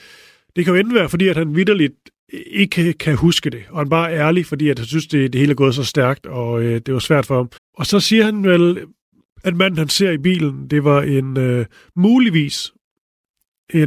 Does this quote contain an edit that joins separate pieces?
yes; 1 cut; at 7.6 s

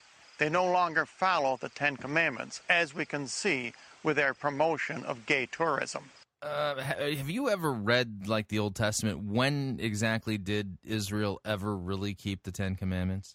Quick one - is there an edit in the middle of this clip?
no; 0 cuts

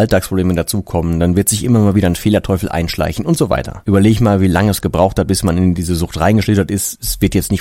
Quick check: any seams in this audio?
yes; 1 cut; at 3.8 s

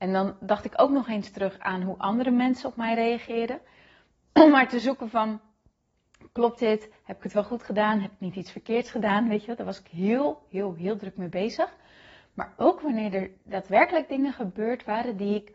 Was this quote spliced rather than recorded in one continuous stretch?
no; 0 cuts

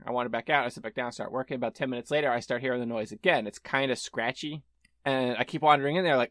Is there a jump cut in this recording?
no; 0 cuts

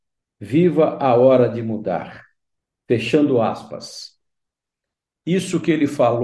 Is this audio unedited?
yes; 0 cuts

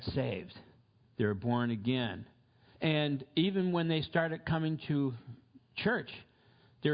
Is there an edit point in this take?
yes; 1 cut; at 2.7 s

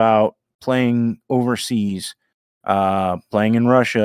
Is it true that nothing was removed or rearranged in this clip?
yes; 0 cuts

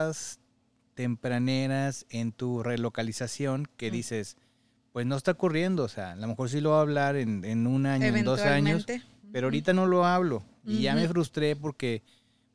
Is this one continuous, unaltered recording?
yes; 0 cuts

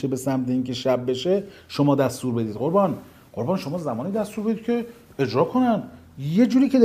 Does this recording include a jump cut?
no; 0 cuts

